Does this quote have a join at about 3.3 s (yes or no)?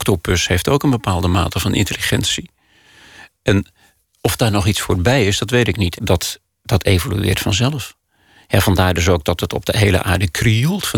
no